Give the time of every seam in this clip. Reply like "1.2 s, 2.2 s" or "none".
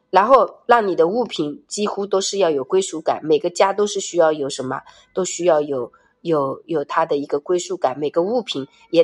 none